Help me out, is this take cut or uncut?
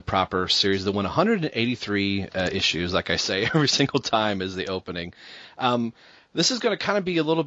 uncut